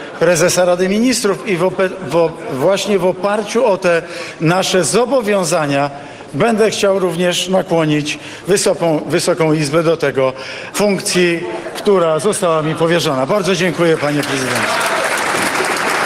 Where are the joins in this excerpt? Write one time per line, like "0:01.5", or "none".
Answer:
0:10.7